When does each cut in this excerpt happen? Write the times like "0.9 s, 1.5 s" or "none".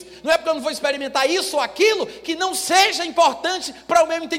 none